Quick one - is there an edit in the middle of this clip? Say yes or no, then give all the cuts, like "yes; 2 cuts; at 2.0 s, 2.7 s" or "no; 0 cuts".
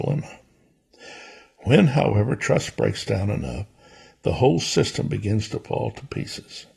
no; 0 cuts